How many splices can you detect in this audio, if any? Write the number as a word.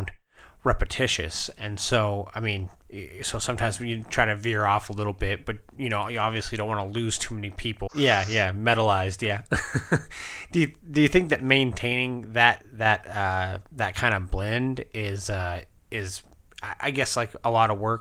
one